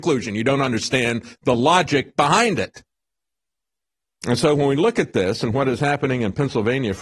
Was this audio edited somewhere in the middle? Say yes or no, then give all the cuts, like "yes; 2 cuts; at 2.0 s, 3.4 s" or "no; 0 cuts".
no; 0 cuts